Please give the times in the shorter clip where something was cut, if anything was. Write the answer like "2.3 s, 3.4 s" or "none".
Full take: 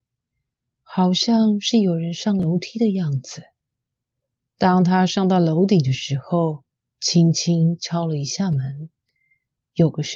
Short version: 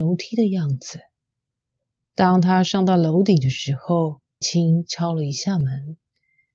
4.4 s